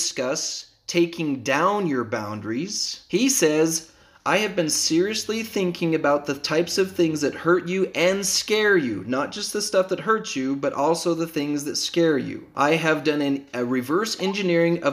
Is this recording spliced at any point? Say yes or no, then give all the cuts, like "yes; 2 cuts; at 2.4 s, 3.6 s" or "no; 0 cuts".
no; 0 cuts